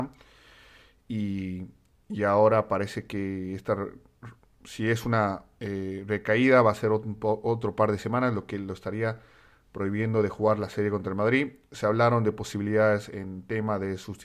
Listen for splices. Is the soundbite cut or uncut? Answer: uncut